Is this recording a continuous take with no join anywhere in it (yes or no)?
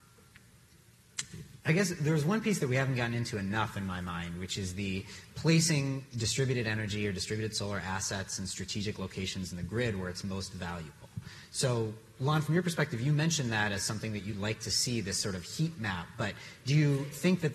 no